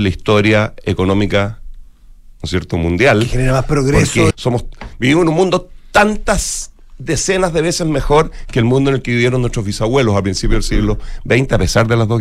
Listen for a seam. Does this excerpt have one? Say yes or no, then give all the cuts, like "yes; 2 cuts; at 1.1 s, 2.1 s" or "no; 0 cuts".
yes; 1 cut; at 4.3 s